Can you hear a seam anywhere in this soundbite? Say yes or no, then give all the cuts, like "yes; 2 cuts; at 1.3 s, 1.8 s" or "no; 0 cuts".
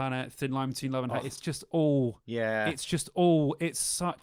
no; 0 cuts